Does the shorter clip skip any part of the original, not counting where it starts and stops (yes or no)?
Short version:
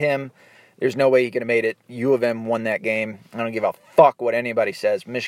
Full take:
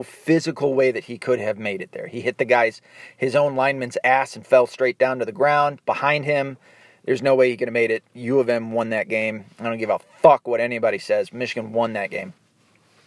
no